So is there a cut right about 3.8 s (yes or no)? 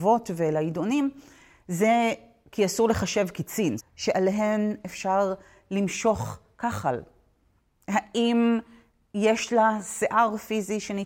yes